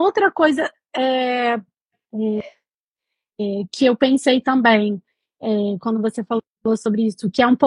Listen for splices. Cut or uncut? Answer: uncut